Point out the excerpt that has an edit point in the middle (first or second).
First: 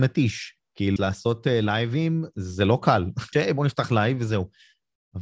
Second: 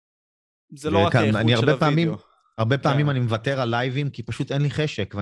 first